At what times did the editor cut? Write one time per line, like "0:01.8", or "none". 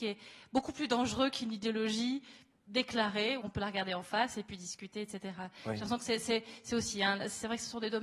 0:03.4